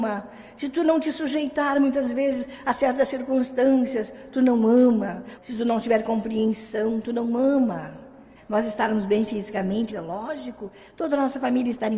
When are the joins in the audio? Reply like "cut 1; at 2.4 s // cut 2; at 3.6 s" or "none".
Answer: cut 1; at 5.4 s // cut 2; at 8.4 s // cut 3; at 9.9 s